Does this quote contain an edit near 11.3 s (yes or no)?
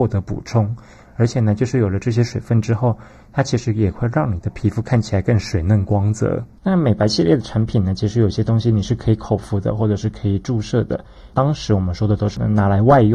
no